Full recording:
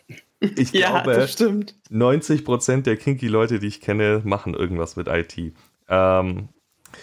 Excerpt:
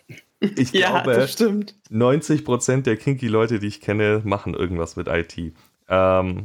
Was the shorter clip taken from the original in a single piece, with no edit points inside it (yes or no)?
yes